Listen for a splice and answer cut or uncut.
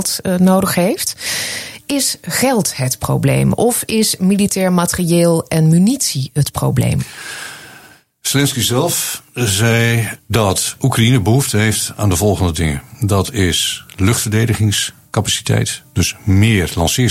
uncut